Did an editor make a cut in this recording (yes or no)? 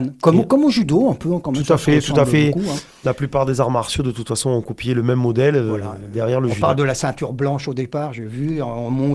no